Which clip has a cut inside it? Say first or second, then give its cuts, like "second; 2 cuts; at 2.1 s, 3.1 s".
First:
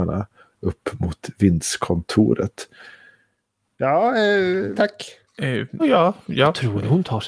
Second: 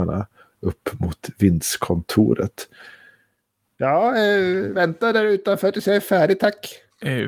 first; 2 cuts; at 4.7 s, 5.8 s